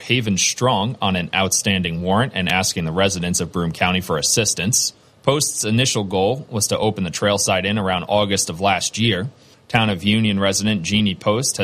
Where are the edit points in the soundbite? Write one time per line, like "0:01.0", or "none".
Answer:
0:05.0
0:09.5